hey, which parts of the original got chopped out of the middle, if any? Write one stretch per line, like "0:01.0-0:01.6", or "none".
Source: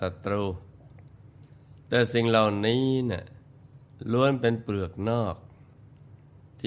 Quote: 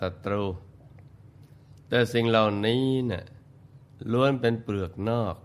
none